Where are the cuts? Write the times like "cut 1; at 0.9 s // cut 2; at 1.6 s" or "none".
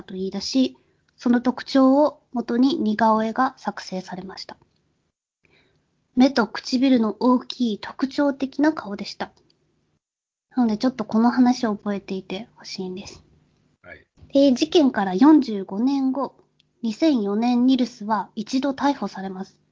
none